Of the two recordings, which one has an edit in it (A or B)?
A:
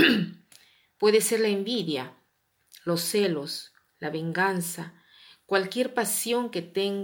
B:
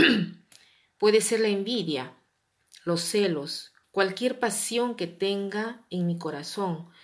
B